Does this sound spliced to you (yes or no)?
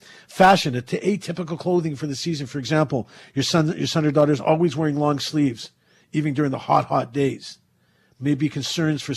no